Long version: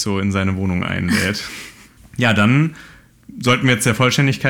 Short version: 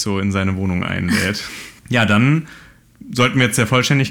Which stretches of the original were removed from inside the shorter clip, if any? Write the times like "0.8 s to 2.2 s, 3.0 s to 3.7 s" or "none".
1.8 s to 2.1 s